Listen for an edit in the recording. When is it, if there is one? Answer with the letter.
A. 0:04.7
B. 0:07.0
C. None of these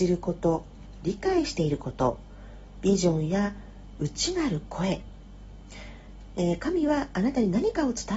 C